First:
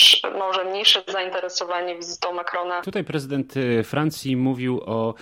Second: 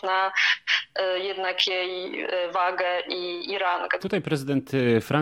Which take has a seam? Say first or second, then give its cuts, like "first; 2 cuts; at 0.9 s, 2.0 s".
second; 1 cut; at 4.0 s